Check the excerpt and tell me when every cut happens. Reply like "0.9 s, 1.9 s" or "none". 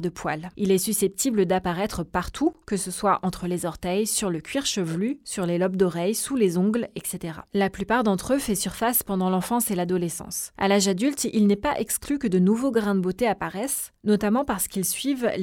none